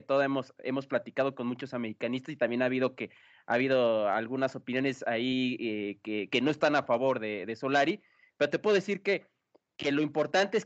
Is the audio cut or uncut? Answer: uncut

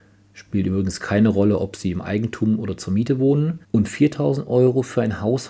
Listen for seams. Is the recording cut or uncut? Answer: cut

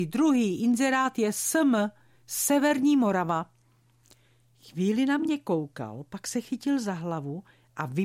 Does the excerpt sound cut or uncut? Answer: uncut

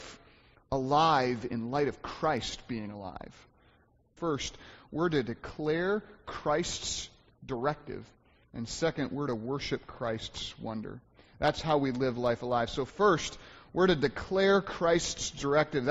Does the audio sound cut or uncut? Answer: cut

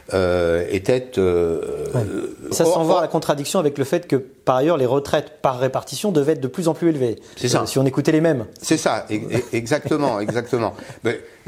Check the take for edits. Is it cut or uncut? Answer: cut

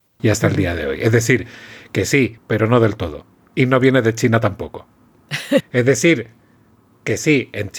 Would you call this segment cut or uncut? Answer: cut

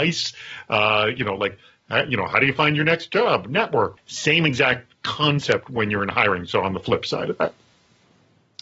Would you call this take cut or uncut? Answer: cut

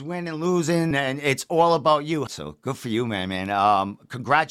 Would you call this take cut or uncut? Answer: cut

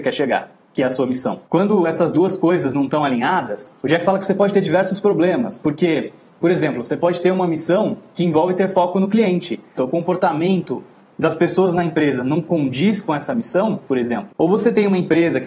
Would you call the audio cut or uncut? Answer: cut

